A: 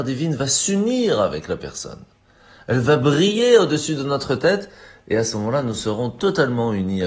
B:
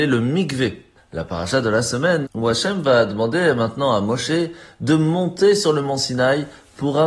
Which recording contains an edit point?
B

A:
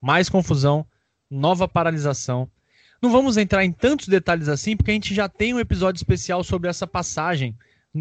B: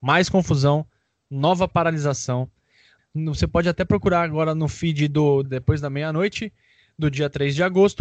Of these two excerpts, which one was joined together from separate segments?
B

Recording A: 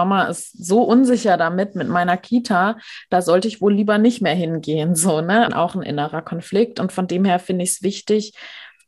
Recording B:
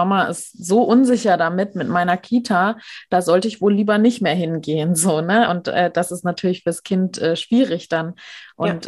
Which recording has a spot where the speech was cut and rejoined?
A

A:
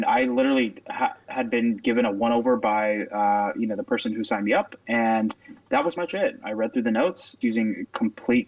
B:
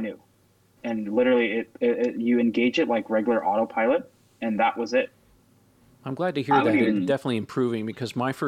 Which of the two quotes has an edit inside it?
A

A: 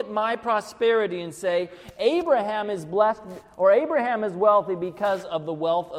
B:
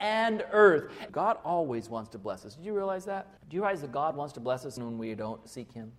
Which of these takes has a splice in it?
B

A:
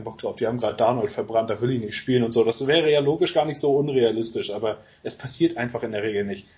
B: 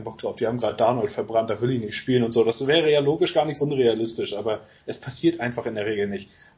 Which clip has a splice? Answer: B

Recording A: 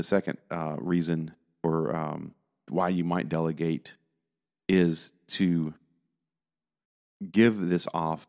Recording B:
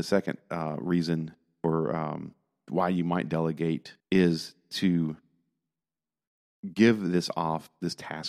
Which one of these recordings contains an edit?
B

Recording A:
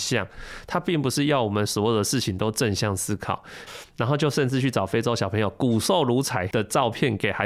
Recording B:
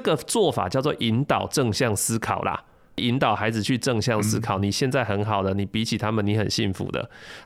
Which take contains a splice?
A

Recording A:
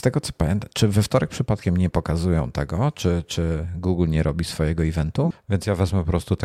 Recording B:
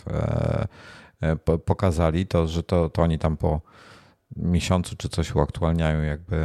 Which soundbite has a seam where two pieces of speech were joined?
A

